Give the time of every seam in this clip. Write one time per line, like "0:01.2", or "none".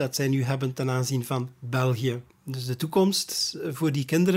0:02.3